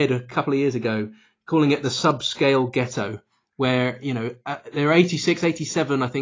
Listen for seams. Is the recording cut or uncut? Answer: uncut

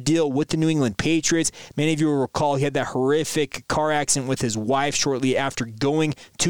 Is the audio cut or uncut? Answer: cut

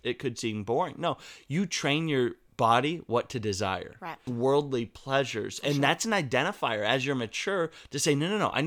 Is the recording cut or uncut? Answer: cut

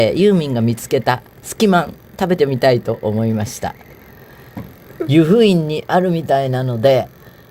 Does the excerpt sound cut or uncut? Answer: cut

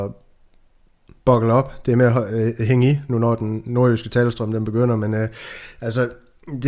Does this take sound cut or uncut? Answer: uncut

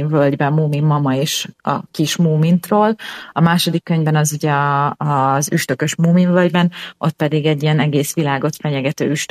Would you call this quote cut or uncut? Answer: uncut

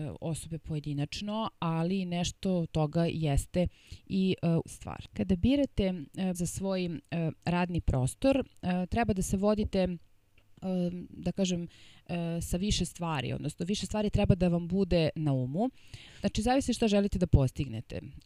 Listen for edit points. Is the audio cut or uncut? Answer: cut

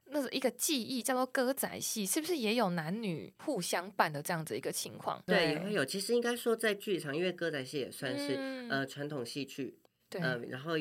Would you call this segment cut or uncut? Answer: cut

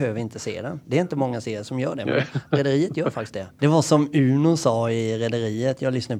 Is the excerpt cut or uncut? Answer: cut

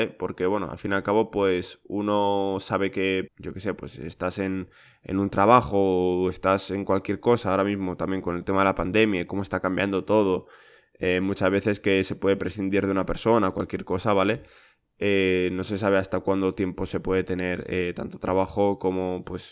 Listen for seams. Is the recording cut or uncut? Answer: cut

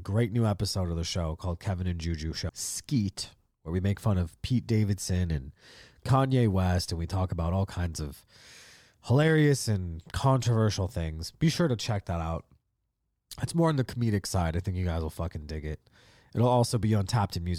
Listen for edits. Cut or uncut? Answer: cut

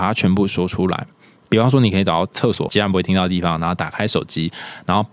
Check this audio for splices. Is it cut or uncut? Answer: cut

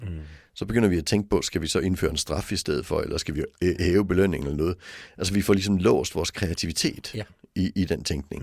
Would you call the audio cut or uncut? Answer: uncut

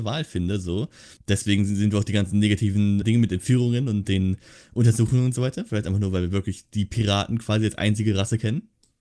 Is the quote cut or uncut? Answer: cut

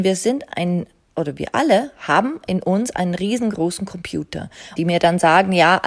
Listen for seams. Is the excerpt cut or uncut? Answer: cut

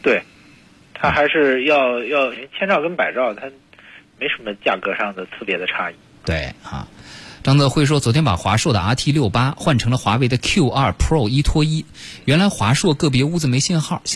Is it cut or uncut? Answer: cut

